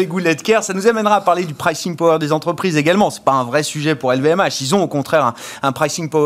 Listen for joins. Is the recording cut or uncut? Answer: uncut